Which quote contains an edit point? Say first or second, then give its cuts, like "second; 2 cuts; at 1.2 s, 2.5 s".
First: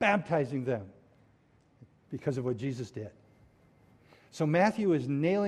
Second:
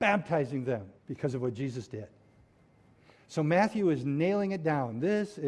second; 1 cut; at 1.0 s